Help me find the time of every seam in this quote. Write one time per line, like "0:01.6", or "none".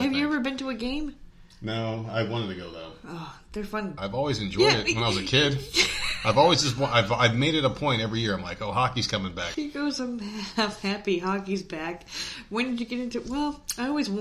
0:04.0
0:09.5